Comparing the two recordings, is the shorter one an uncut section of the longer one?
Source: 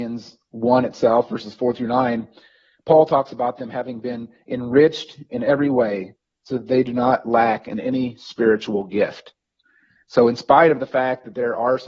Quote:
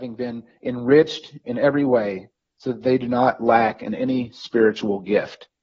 yes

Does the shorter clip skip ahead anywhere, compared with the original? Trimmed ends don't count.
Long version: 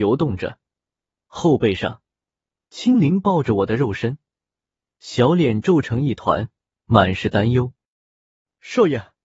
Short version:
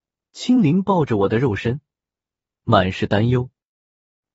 yes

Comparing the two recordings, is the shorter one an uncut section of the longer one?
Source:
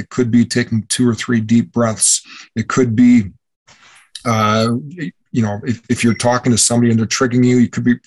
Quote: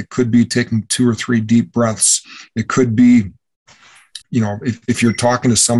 no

